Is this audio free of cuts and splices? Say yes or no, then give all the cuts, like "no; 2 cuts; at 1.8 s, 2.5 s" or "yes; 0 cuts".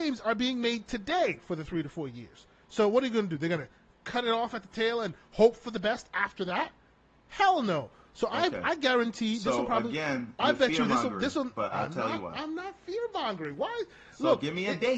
yes; 0 cuts